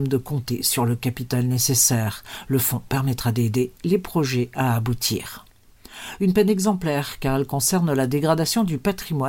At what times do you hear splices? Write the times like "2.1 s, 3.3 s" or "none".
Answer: none